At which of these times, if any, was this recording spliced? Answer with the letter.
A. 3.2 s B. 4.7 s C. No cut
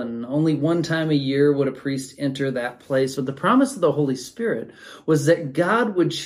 C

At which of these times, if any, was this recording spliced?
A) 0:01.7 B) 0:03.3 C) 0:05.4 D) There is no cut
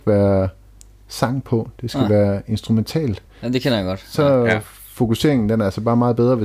D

